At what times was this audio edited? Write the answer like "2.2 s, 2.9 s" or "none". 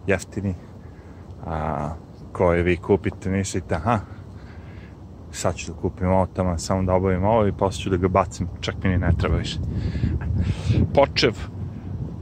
10.2 s